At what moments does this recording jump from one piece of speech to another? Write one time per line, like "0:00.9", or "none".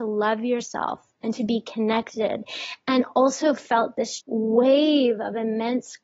0:04.2